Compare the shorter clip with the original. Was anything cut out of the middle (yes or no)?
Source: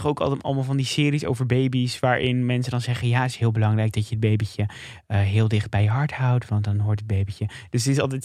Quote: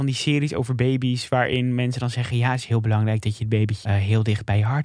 yes